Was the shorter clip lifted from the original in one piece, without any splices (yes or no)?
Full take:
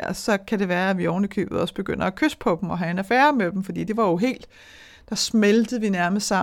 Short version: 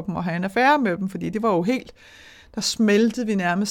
yes